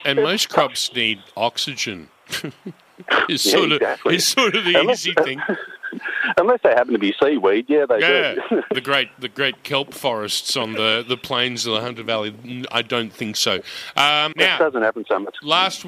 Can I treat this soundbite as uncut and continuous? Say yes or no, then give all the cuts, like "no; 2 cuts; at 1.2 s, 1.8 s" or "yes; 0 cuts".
no; 2 cuts; at 8.7 s, 14.3 s